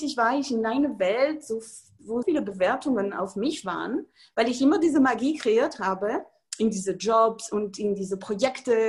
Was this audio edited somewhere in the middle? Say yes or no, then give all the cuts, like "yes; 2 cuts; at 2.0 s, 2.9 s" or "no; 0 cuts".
yes; 1 cut; at 2.2 s